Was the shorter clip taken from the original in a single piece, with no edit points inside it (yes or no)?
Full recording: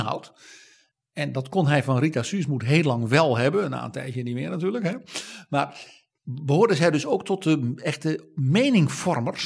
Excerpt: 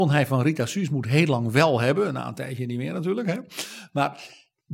yes